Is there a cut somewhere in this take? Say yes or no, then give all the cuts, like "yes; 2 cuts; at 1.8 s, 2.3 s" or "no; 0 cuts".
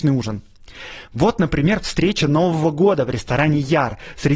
no; 0 cuts